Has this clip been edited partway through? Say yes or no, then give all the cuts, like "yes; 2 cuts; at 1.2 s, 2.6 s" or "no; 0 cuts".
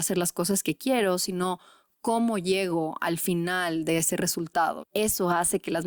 yes; 1 cut; at 4.8 s